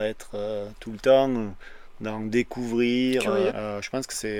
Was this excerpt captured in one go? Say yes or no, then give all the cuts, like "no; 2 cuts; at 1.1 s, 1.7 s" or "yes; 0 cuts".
no; 1 cut; at 3.5 s